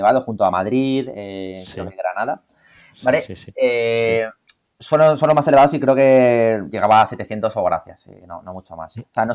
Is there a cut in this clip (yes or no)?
no